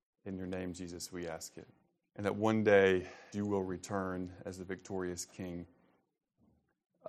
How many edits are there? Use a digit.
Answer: 2